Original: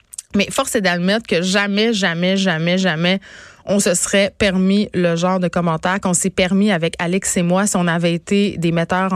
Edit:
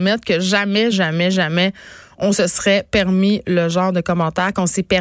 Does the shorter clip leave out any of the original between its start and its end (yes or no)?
yes